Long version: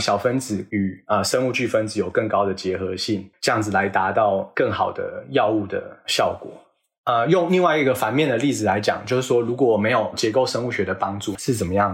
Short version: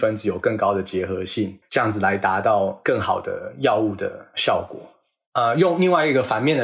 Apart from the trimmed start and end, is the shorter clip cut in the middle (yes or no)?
no